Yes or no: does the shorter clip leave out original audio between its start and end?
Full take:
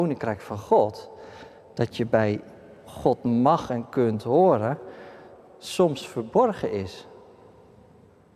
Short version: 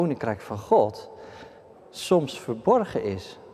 yes